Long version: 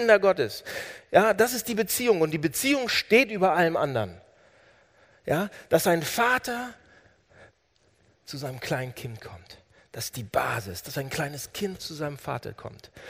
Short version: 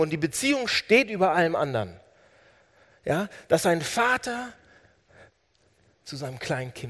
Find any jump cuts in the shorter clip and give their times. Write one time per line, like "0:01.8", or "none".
none